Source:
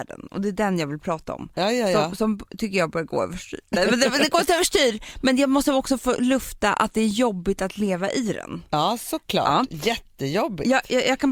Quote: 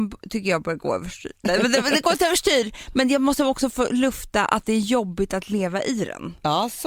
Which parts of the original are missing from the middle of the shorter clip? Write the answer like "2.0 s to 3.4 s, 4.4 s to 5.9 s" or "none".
none